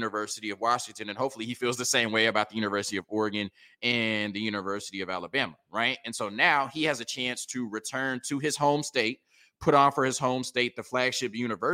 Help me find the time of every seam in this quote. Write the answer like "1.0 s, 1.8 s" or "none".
none